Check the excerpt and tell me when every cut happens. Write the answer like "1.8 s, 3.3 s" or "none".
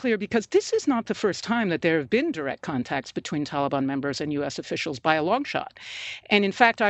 none